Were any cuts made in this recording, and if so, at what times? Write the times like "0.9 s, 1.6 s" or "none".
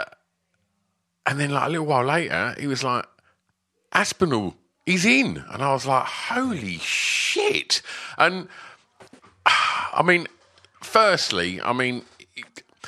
none